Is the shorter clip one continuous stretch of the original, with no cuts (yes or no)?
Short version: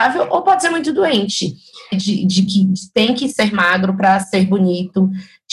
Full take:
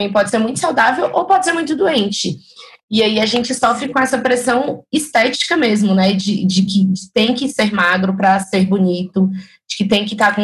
no